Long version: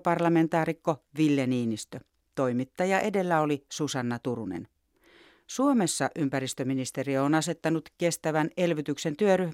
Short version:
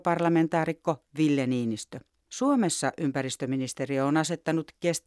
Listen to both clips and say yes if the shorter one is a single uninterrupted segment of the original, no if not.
no